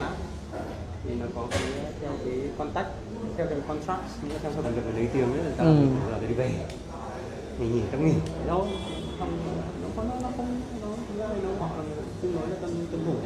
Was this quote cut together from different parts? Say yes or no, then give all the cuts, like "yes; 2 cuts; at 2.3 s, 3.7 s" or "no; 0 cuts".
yes; 2 cuts; at 4.6 s, 11.6 s